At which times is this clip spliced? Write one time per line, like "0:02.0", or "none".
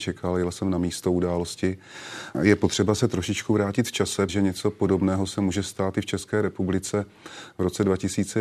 0:02.3
0:04.3